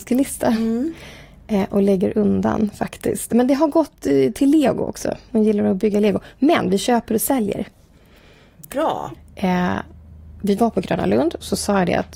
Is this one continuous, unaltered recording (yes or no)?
no